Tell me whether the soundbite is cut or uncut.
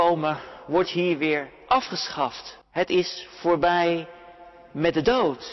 cut